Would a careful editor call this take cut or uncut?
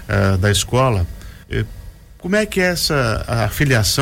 cut